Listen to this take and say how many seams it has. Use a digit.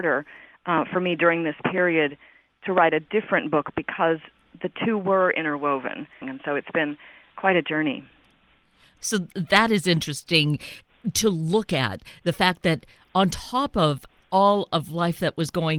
1